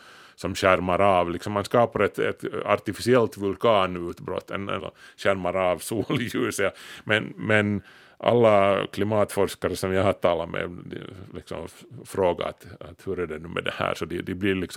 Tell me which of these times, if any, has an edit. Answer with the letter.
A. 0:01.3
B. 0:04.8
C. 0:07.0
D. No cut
B